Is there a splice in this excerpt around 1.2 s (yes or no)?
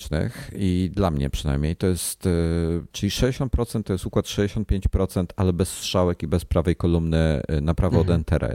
no